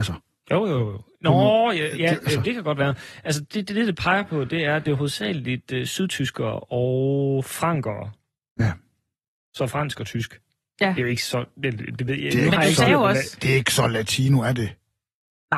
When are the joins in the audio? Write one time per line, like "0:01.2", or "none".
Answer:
none